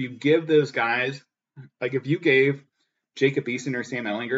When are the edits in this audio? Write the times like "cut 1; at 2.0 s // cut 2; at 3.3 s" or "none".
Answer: none